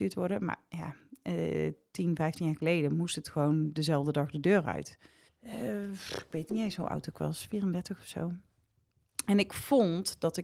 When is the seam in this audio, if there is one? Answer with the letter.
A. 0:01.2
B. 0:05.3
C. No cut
B